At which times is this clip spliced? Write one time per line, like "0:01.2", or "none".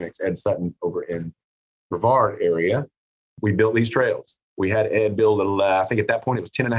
0:03.3